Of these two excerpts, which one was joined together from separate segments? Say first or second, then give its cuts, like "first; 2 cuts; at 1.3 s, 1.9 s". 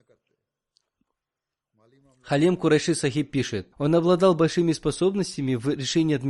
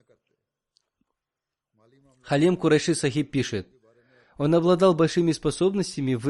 first; 1 cut; at 3.7 s